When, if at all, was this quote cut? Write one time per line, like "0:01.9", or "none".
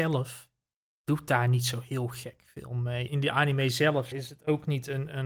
0:03.1
0:04.1